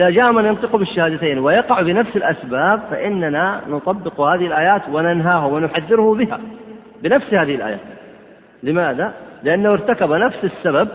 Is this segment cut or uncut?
uncut